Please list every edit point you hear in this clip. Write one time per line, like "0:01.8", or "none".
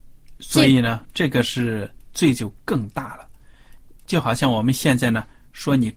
none

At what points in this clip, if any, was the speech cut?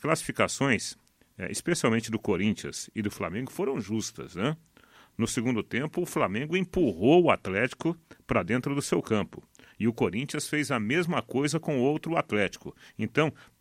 none

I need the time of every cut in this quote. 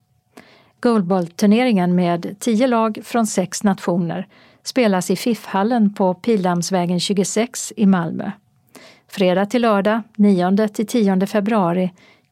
none

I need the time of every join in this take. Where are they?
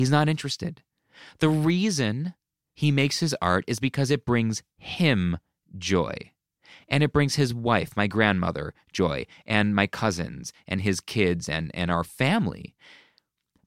none

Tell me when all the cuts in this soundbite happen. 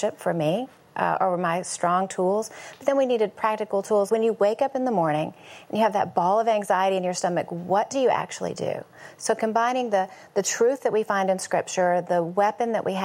0:04.1

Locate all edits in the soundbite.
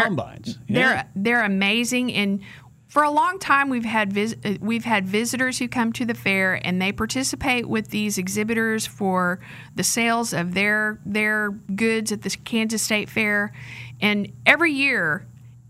0:11.6

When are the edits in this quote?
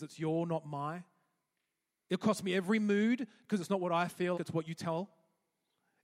0:04.3

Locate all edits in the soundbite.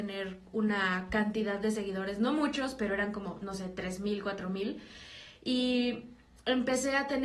none

